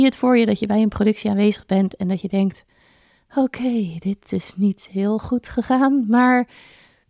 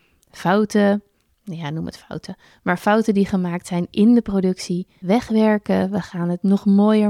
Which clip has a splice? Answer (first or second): second